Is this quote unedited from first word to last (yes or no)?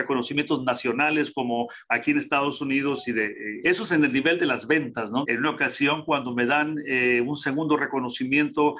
no